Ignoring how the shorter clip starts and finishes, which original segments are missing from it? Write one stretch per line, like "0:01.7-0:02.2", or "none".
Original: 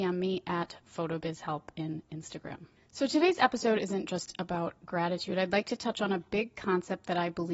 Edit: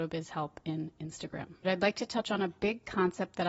0:02.8-0:05.3